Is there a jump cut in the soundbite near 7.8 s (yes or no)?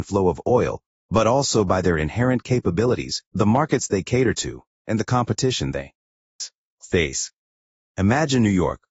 yes